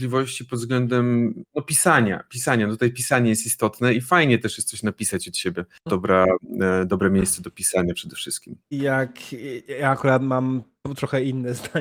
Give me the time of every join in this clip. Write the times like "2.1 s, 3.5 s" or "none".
5.9 s